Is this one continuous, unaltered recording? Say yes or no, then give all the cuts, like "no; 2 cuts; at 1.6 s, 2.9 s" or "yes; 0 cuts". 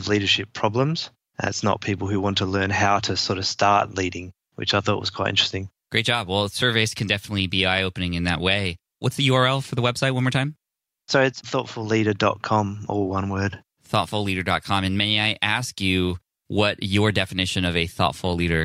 yes; 0 cuts